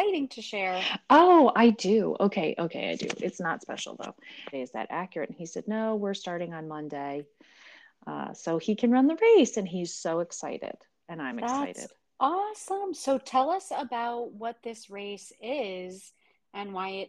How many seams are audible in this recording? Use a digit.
1